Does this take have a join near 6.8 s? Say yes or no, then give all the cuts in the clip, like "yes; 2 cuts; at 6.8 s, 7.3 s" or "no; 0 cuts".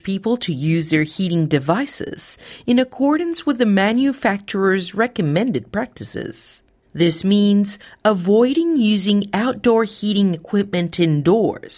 no; 0 cuts